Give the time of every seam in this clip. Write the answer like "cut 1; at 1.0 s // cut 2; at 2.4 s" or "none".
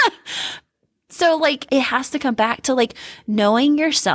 cut 1; at 1.7 s

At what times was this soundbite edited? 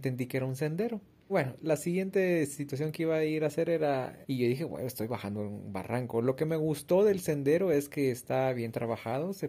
cut 1; at 1.3 s // cut 2; at 4.2 s

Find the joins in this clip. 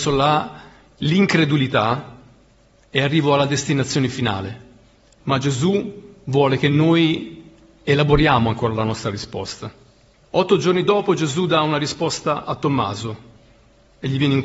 cut 1; at 5.1 s // cut 2; at 10.2 s

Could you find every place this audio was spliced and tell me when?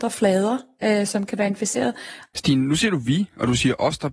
cut 1; at 2.3 s

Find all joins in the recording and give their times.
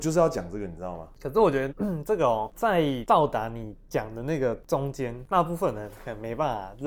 cut 1; at 1.7 s

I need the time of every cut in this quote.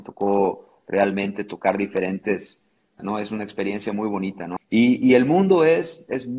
cut 1; at 3.0 s // cut 2; at 4.6 s

